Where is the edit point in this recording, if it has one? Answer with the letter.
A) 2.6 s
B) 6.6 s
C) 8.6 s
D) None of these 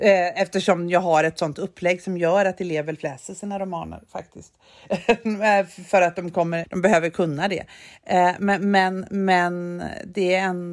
B